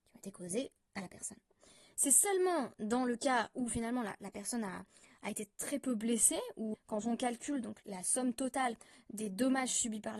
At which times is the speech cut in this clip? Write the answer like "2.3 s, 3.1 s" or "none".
6.7 s, 7.8 s